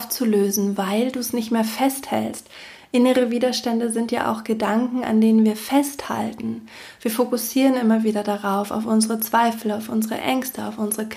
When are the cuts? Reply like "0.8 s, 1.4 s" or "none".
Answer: none